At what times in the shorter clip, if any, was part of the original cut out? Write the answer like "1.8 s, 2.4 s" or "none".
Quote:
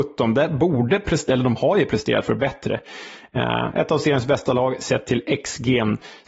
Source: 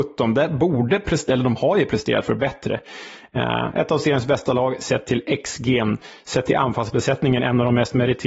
none